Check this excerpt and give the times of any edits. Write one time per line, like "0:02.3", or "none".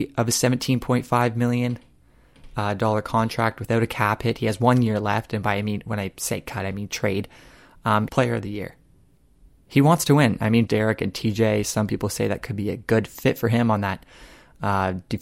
0:08.1
0:10.7